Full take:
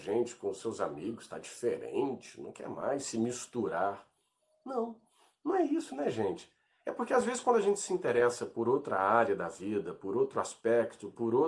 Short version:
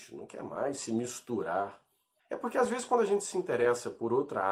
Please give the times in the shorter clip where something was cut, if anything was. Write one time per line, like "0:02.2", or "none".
0:02.2